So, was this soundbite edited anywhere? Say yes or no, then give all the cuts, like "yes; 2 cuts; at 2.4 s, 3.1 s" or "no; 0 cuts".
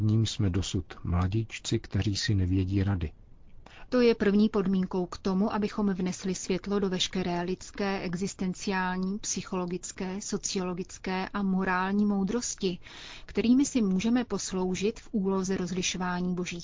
yes; 1 cut; at 3.9 s